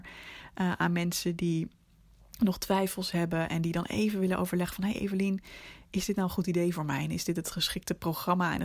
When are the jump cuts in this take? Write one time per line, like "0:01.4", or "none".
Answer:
none